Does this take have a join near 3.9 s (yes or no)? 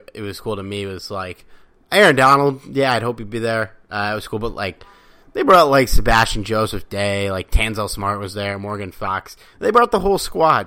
no